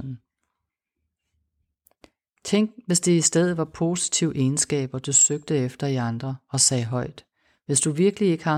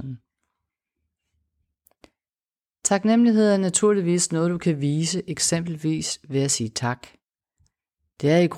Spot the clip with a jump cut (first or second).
first